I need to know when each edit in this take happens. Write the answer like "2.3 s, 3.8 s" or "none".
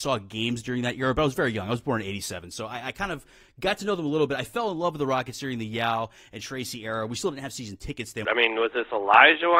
8.2 s